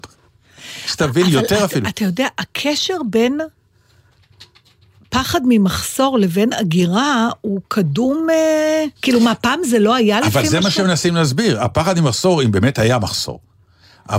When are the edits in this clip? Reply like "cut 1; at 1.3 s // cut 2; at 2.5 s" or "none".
cut 1; at 9.0 s